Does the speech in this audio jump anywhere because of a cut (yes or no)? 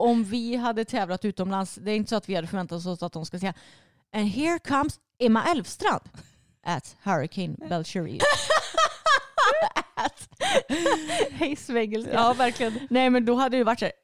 yes